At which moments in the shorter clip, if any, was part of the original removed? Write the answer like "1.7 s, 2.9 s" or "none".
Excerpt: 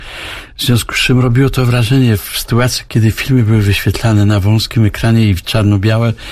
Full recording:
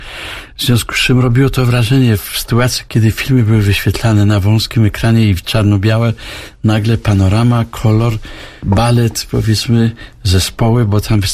none